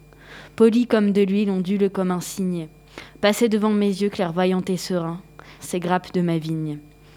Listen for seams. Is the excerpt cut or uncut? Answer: cut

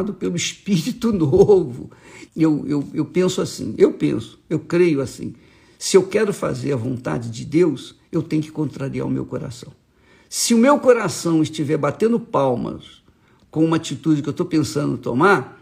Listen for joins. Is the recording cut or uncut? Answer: cut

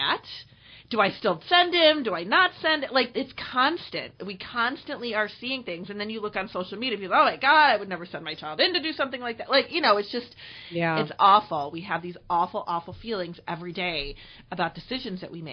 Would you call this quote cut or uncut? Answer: cut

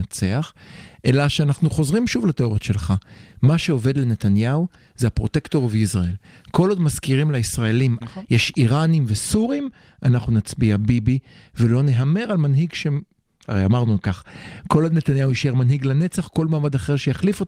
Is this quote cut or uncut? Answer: cut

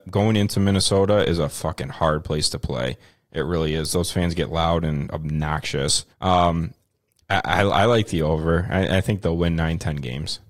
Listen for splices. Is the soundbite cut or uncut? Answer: cut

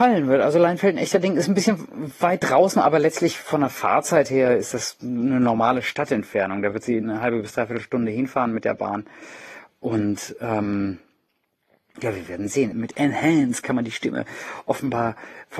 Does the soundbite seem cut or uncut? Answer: cut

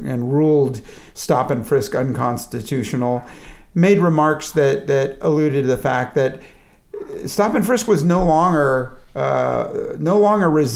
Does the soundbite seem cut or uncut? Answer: uncut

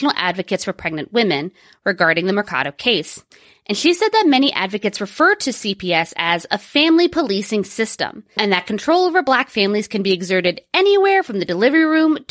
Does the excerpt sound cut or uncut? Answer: cut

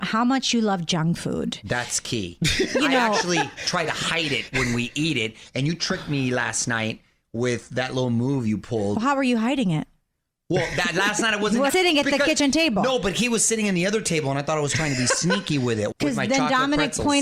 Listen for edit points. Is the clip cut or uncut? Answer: cut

